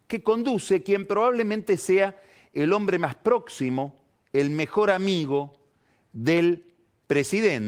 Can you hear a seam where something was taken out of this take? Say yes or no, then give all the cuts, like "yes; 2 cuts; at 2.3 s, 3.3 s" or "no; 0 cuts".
no; 0 cuts